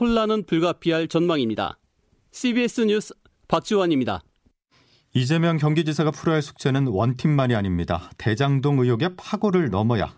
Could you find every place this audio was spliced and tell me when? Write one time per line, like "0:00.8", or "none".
none